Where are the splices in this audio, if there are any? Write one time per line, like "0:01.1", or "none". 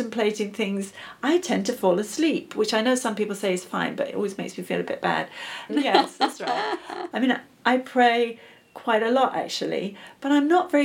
0:05.7
0:07.1